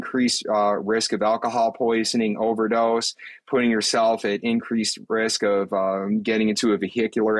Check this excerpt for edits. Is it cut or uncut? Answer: uncut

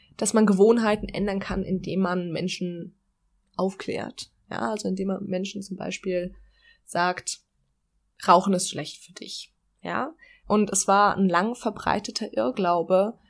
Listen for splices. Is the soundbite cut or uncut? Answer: cut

